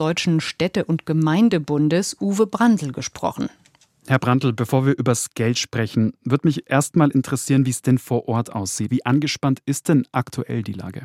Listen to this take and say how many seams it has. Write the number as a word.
one